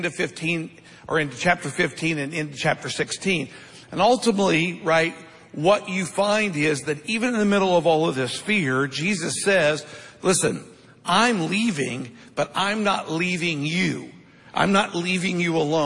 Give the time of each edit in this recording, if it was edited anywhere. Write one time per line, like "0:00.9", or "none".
none